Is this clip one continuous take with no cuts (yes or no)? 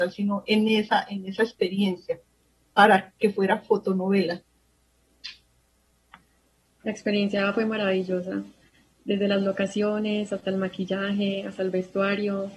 yes